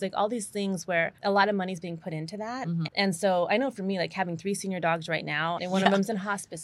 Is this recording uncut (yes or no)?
no